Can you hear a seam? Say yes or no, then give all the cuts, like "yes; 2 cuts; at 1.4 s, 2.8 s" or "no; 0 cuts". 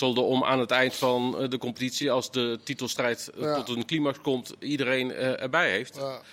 no; 0 cuts